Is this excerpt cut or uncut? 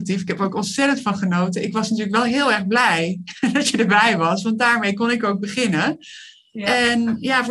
uncut